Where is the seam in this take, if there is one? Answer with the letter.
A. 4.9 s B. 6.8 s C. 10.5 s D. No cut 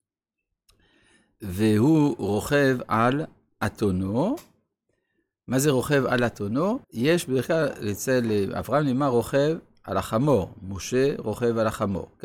B